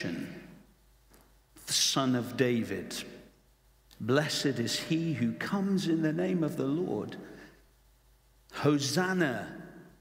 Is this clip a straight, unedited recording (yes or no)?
yes